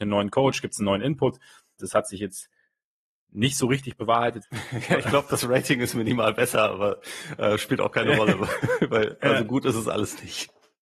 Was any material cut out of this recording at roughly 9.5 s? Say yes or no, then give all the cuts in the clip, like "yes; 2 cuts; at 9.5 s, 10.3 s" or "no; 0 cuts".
no; 2 cuts; at 1.8 s, 4.4 s